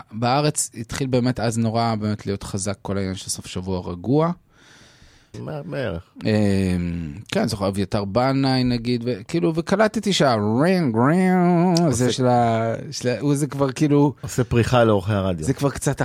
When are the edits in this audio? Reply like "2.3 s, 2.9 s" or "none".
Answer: 5.3 s